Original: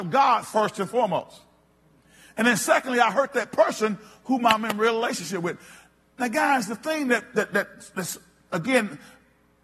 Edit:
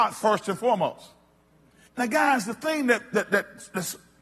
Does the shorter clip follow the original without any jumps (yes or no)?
no